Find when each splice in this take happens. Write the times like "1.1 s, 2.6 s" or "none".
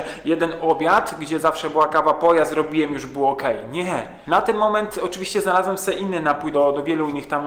4.2 s, 6.5 s